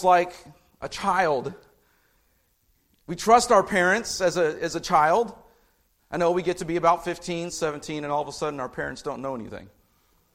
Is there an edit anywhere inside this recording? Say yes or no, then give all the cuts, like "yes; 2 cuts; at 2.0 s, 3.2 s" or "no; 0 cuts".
yes; 1 cut; at 7.5 s